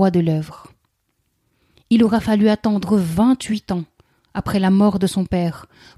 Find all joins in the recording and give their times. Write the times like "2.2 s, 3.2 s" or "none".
none